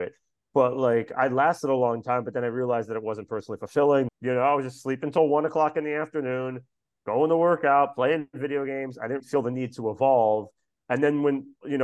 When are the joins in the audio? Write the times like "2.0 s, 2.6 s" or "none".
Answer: 4.1 s, 9.2 s